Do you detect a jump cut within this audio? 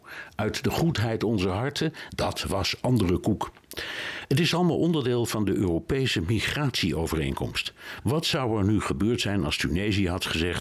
yes; 2 cuts; at 2.1 s, 8.0 s

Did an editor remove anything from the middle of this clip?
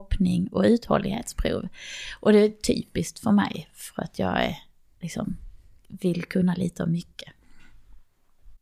no; 0 cuts

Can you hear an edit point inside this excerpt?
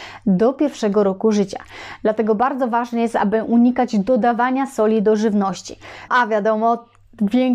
yes; 1 cut; at 6.1 s

